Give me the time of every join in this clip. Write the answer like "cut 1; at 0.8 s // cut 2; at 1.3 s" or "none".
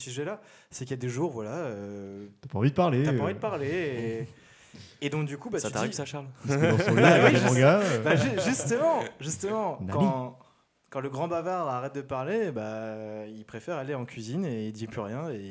none